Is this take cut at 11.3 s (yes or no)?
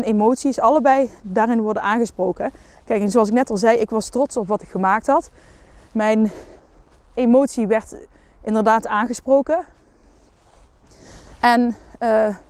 no